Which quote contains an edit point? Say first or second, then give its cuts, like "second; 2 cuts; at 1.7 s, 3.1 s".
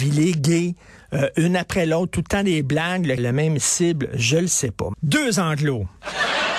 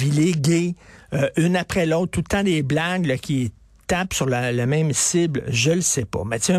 first; 2 cuts; at 3.2 s, 4.9 s